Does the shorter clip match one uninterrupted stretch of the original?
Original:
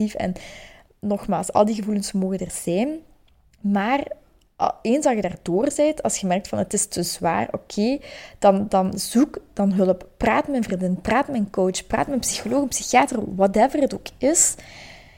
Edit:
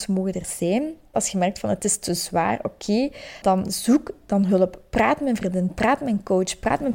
no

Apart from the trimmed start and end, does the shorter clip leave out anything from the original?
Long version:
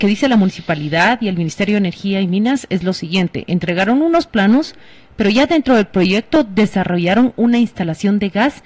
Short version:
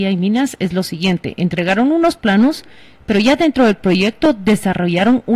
no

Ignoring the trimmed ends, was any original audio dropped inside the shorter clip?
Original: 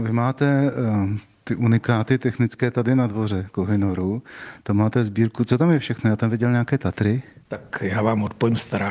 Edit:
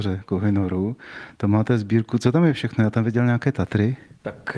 no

